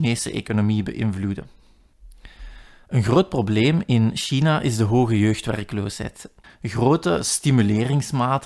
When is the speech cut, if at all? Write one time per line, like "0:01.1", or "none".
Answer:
0:06.4

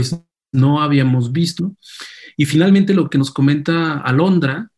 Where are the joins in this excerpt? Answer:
0:01.6

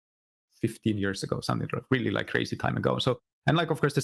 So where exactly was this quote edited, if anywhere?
none

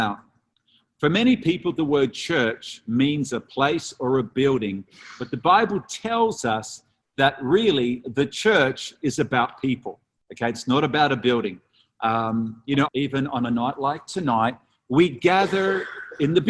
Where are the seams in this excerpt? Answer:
0:12.9

